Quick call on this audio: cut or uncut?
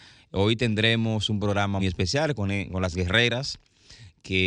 cut